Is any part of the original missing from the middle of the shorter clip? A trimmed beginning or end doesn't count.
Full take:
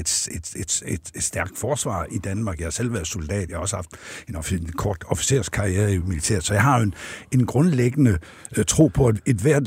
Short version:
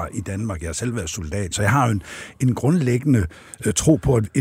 yes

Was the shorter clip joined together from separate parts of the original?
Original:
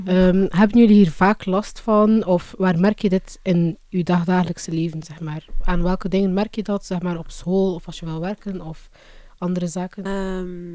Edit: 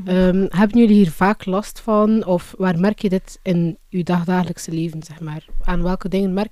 no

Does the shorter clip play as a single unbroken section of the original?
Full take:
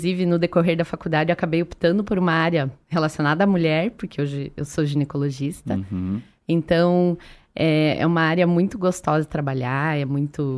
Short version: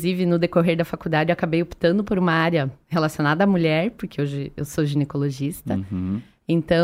yes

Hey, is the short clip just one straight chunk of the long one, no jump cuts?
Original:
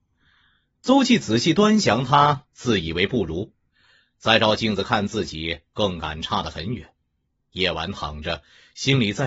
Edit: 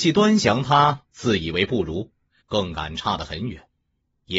no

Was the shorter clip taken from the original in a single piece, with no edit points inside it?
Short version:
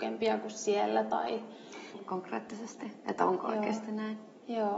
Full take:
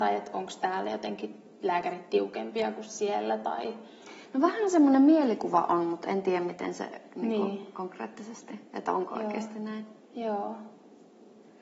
no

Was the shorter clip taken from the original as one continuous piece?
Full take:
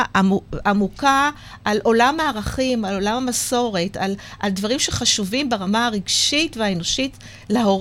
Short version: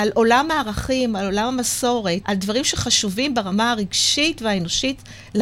no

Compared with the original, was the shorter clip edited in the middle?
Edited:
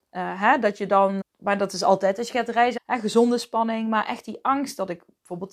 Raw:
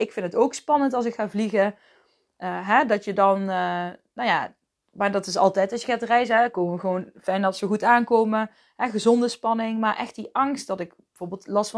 yes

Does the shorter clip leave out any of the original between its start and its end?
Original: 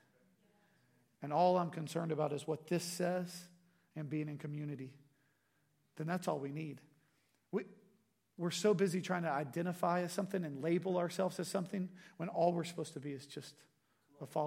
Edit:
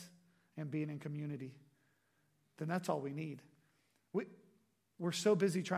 no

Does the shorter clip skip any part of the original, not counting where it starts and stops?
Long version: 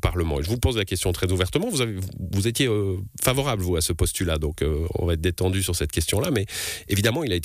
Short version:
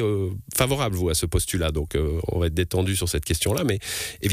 no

